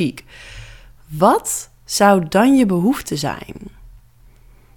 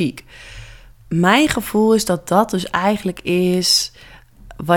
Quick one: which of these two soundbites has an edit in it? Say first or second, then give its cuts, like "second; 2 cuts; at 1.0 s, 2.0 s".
second; 1 cut; at 0.9 s